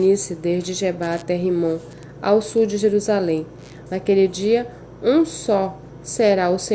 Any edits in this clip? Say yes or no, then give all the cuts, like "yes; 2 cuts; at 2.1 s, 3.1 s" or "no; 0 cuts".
yes; 1 cut; at 3.8 s